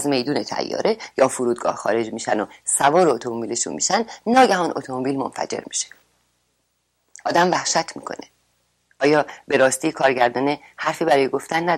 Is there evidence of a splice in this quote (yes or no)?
no